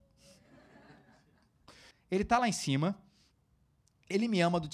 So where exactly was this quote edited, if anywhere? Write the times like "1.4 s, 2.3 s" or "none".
1.9 s